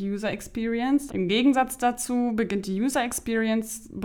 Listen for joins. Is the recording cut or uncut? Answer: cut